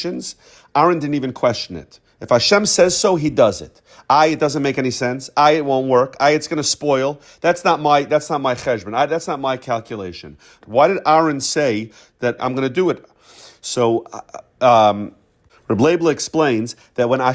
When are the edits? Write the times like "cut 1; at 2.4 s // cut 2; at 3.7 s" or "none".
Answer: cut 1; at 10.6 s // cut 2; at 12.4 s

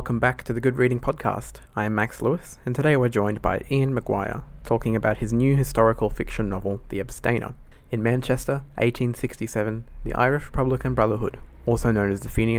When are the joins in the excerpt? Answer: cut 1; at 1.7 s

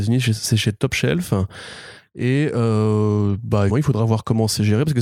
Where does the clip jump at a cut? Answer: cut 1; at 3.7 s

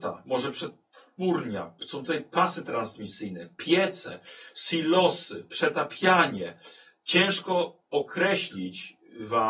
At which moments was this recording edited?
cut 1; at 7.8 s

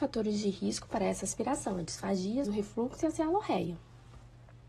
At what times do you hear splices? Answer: cut 1; at 2.4 s

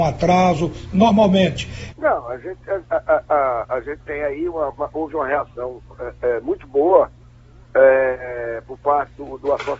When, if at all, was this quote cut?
cut 1; at 1.9 s

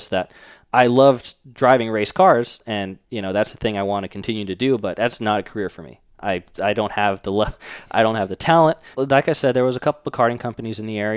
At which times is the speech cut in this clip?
cut 1; at 3.0 s // cut 2; at 8.9 s

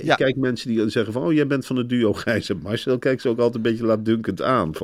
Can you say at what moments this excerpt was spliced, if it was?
none

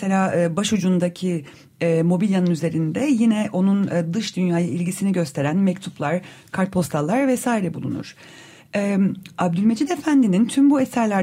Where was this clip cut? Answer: none

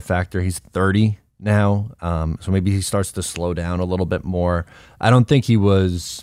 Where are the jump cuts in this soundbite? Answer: cut 1; at 4.8 s

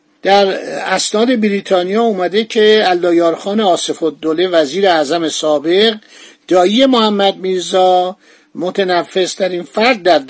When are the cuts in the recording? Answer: none

